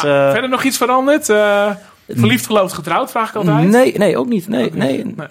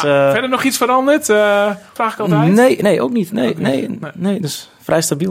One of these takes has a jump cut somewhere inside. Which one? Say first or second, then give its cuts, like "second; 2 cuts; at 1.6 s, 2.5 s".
second; 1 cut; at 2.0 s